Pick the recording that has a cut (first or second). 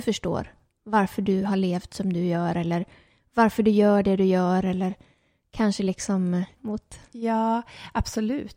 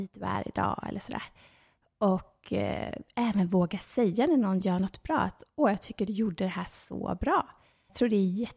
first